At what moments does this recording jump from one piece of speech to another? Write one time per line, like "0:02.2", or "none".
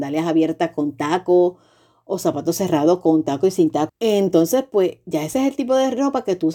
0:03.9